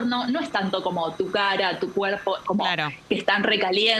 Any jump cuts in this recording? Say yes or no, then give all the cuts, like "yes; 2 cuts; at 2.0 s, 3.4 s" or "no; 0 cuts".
yes; 1 cut; at 2.4 s